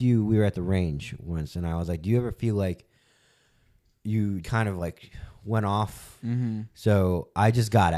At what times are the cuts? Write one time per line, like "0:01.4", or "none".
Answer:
0:04.4
0:06.2